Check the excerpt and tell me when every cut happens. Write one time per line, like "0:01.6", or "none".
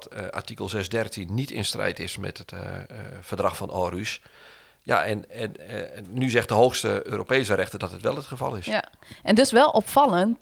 none